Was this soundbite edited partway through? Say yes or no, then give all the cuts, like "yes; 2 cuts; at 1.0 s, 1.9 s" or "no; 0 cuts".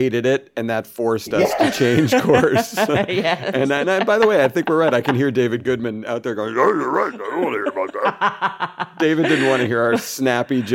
no; 0 cuts